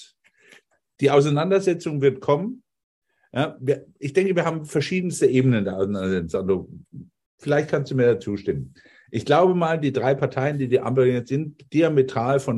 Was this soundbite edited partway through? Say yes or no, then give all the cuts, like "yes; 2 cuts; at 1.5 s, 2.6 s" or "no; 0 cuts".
no; 0 cuts